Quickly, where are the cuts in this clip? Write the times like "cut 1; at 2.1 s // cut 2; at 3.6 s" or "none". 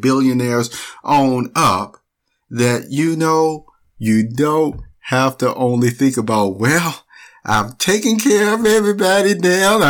none